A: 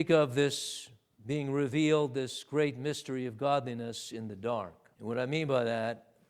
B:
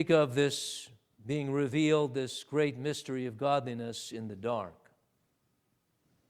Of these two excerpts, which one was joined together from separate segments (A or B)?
A